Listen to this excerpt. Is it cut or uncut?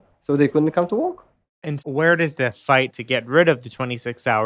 cut